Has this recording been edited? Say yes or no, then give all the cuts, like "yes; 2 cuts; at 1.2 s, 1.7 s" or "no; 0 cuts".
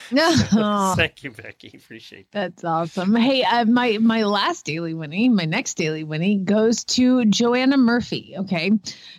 yes; 1 cut; at 0.9 s